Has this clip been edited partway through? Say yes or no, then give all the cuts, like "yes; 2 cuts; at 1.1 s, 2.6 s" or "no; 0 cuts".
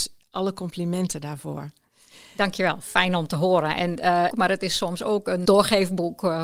yes; 2 cuts; at 4.3 s, 5.4 s